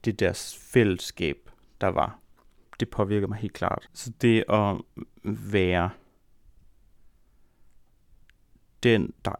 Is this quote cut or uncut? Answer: cut